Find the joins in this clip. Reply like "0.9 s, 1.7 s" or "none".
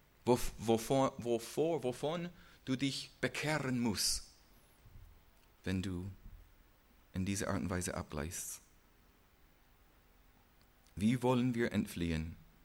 5.6 s